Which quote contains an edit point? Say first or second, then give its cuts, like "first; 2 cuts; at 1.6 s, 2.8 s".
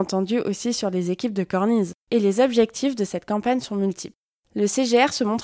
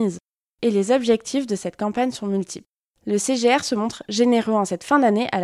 first; 1 cut; at 2.0 s